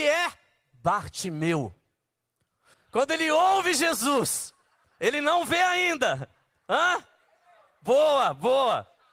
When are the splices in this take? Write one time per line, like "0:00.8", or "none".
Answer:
0:02.7

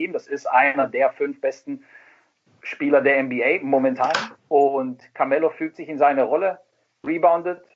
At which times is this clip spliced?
0:04.4

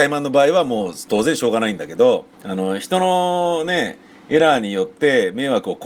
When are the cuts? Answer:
0:02.3

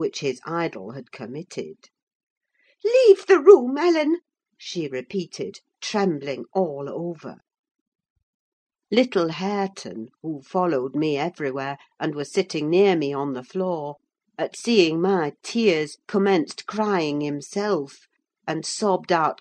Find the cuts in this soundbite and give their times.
none

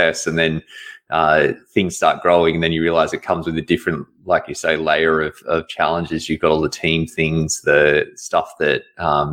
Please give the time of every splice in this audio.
none

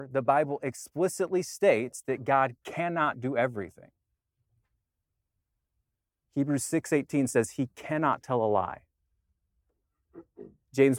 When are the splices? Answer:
none

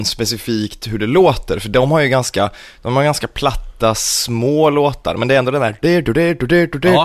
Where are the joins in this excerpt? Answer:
0:05.8

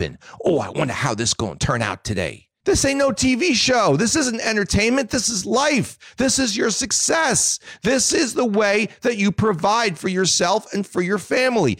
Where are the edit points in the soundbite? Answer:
none

